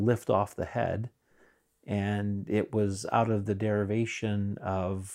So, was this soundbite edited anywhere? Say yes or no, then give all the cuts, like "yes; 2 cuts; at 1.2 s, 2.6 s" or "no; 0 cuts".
no; 0 cuts